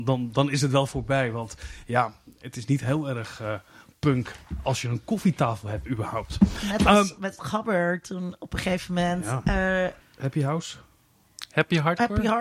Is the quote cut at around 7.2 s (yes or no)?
yes